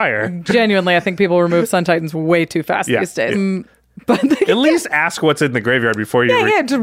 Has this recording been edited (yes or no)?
yes